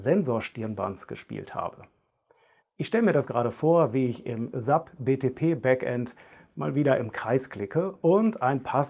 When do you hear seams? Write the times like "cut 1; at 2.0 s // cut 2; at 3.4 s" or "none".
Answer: cut 1; at 2.6 s